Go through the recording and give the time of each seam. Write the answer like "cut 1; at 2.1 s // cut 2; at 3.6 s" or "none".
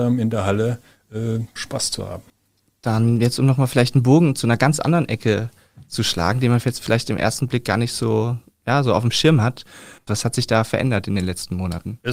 cut 1; at 1.6 s // cut 2; at 10.1 s